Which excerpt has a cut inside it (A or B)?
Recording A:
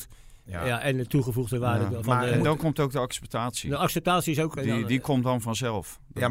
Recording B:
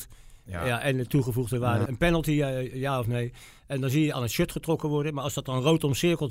B